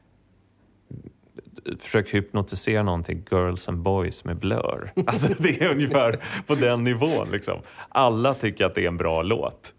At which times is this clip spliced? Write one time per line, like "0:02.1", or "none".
none